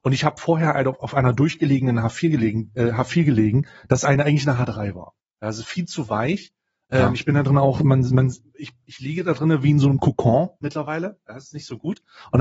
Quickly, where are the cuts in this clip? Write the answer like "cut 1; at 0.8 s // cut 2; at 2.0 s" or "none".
none